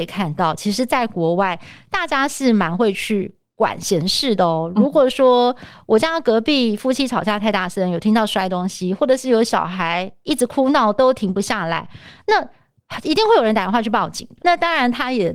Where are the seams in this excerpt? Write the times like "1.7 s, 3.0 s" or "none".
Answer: 14.4 s